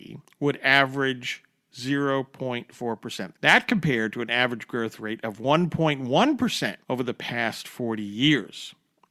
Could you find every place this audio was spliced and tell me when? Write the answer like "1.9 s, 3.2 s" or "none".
3.3 s, 6.8 s